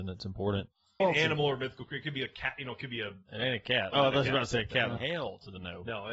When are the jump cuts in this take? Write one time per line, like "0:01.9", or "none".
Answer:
0:01.0
0:03.9
0:05.0